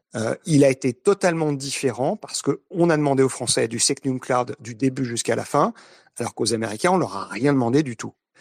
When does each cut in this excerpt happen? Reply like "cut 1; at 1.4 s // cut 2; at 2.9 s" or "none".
none

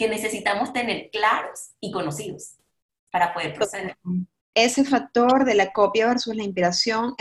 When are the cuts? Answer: cut 1; at 4.5 s

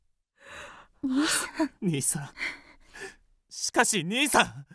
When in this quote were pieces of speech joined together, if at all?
none

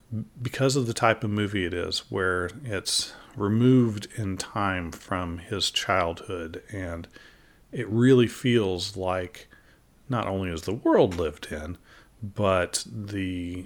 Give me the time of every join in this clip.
none

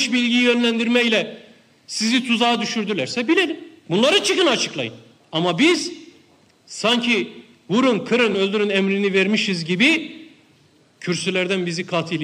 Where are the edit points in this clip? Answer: cut 1; at 8.3 s

